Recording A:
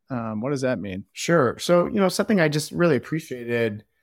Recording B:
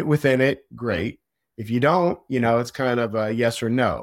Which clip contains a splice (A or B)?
A